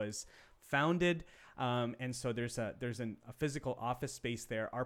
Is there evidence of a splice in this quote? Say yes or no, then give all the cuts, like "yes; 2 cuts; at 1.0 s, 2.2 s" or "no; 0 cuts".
no; 0 cuts